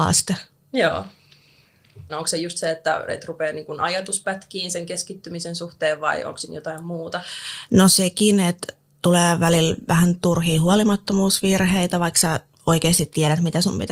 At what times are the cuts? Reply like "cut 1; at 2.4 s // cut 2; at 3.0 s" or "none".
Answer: cut 1; at 2.1 s